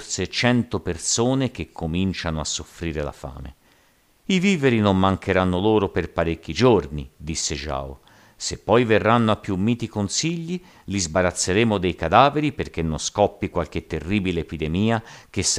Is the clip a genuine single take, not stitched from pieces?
yes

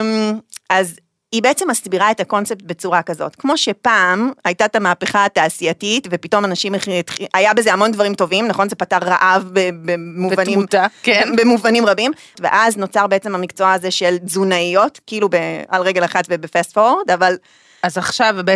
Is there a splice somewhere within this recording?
yes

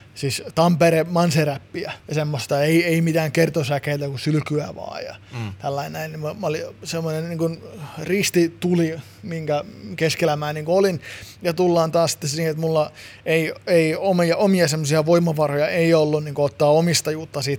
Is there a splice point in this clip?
yes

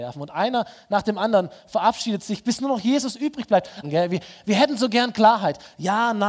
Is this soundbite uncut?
no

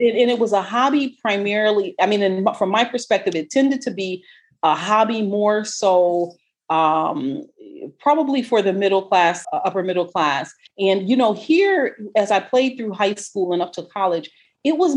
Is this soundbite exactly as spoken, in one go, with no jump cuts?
no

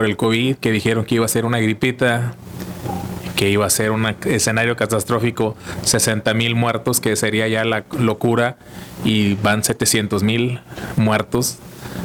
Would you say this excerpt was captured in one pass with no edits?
yes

